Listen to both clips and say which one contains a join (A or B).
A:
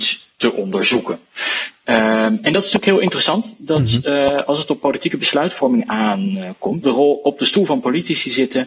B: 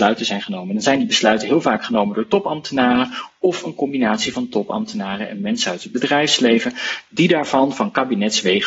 A